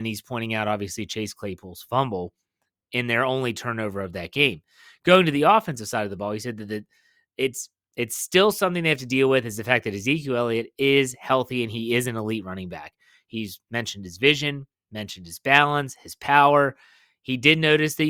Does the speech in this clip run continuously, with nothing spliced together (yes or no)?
yes